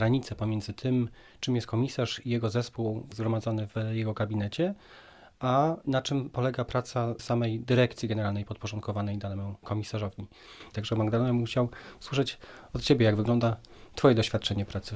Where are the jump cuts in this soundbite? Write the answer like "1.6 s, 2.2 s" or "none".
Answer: none